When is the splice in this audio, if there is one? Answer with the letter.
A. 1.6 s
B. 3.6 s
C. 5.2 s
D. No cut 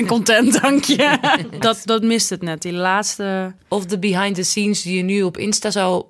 A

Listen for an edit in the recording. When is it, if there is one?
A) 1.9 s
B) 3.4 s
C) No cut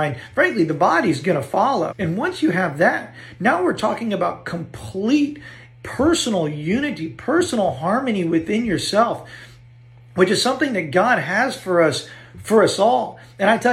A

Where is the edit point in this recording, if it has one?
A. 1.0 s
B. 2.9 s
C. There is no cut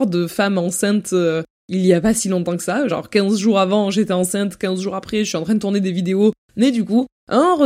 C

